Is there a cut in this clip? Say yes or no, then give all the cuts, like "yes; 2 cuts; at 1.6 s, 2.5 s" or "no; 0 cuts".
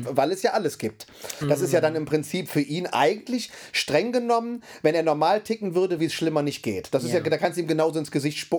yes; 2 cuts; at 1.4 s, 6.0 s